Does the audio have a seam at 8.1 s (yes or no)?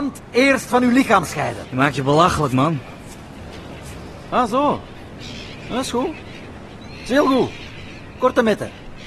no